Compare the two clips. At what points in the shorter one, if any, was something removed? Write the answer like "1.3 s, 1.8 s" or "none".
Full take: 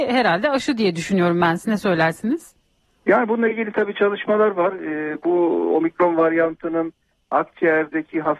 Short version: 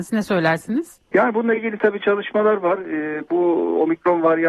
1.0 s